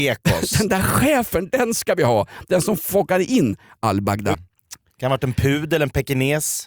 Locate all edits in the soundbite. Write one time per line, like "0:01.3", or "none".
0:04.3